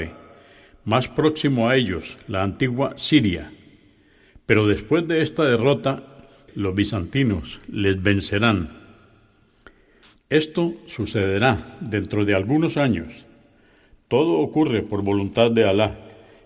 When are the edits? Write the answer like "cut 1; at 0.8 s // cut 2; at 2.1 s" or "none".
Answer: cut 1; at 6.5 s